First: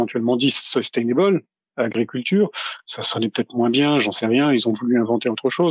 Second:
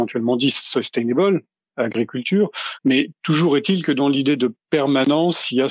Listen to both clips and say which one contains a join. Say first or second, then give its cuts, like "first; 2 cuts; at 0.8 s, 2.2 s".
second; 1 cut; at 2.8 s